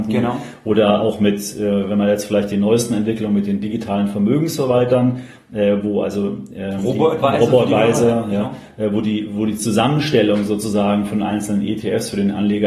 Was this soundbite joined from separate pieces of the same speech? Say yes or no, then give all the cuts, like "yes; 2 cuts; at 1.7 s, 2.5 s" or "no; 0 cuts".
no; 0 cuts